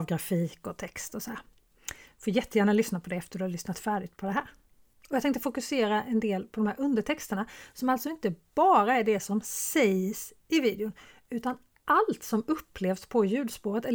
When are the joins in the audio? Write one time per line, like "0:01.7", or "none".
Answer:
none